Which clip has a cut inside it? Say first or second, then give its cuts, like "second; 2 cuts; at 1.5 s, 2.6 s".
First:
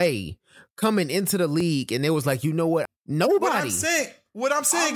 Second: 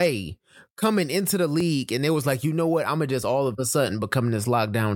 first; 1 cut; at 2.9 s